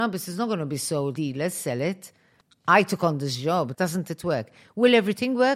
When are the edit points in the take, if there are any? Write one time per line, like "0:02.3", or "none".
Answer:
0:01.2
0:03.7